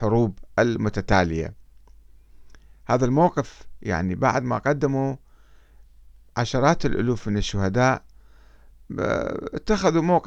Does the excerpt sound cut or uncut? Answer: uncut